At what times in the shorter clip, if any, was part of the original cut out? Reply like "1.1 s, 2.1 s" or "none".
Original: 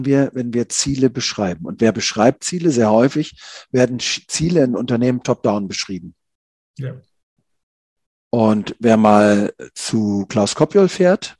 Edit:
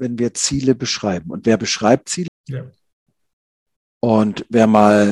2.3 s

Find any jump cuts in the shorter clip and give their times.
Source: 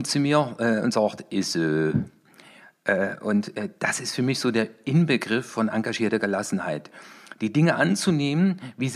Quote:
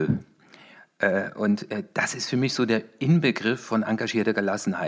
none

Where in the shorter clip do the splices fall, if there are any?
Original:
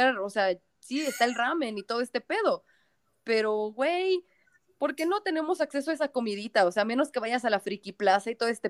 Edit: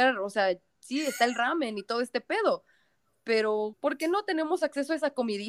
3.7 s

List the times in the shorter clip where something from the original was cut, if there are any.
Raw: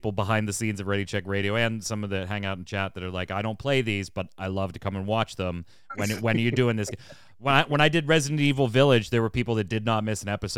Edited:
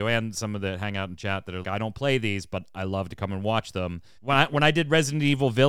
1.6 s, 4.2 s

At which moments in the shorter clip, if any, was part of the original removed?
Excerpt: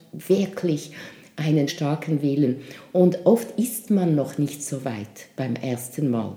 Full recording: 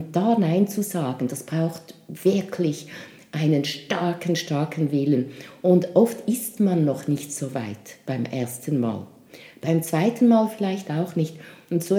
1.7 s

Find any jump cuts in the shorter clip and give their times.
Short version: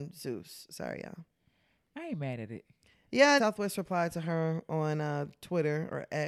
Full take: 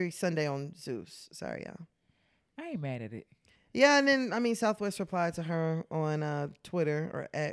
3.4 s

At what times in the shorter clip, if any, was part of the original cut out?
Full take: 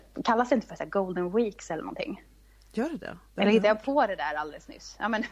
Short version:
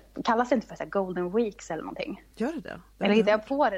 2.3 s

